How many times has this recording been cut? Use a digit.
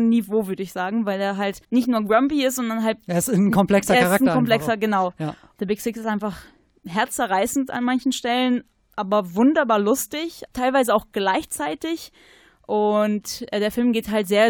1